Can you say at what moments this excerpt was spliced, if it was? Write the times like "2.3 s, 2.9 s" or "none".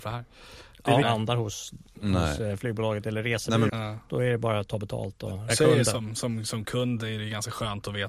1.0 s, 3.7 s, 5.5 s

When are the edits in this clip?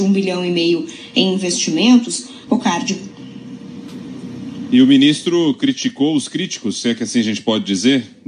2.5 s

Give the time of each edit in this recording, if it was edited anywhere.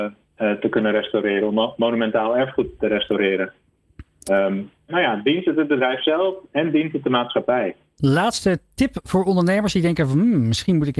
4.9 s

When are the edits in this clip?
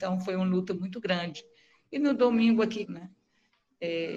2.8 s

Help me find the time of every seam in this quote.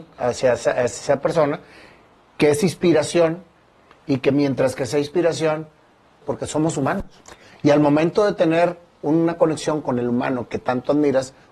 6.2 s

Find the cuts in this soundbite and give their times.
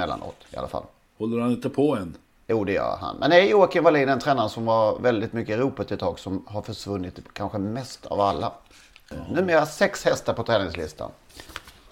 none

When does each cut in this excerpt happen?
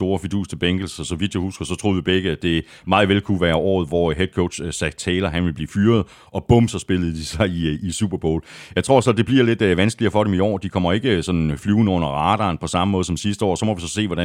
none

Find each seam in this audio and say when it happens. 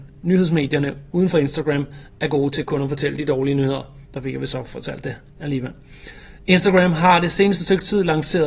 4.1 s

